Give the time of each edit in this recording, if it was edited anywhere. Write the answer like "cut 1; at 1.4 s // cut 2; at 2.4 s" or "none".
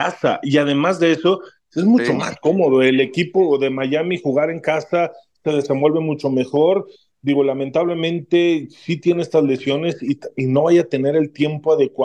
none